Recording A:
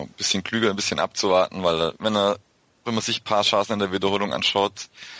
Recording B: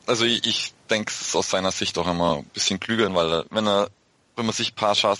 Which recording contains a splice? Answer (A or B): B